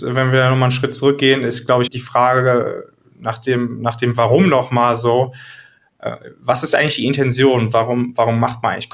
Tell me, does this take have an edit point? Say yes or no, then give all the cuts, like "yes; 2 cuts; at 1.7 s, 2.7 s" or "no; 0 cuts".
yes; 1 cut; at 1.9 s